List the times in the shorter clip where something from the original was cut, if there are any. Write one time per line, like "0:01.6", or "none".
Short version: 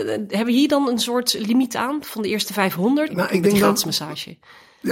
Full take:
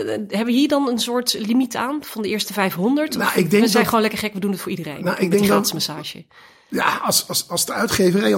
0:03.1